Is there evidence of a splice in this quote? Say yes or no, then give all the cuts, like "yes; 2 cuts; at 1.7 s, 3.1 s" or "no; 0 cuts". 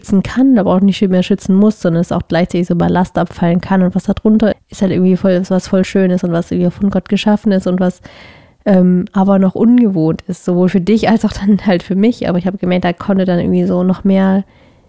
yes; 1 cut; at 4.5 s